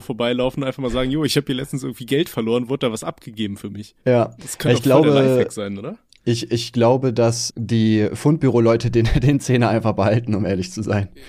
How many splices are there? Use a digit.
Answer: 2